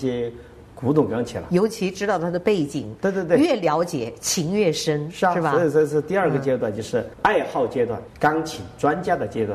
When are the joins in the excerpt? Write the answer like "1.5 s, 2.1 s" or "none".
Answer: 8.1 s